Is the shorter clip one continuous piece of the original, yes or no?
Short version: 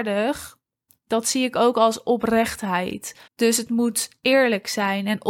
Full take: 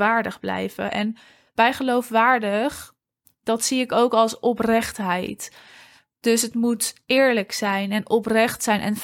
no